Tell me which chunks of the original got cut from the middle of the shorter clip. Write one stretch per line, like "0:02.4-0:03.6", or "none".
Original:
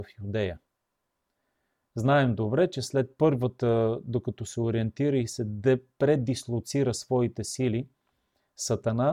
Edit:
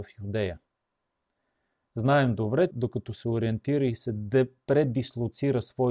0:02.7-0:04.0